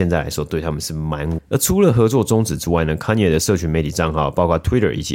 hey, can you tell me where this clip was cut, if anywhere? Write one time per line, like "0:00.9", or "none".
0:01.4